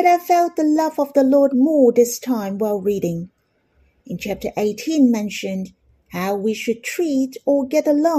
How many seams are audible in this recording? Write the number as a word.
zero